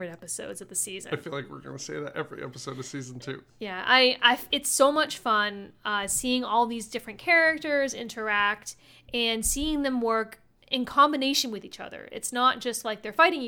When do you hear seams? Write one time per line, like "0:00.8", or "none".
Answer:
none